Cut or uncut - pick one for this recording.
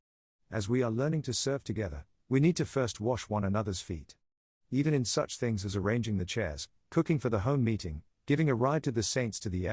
uncut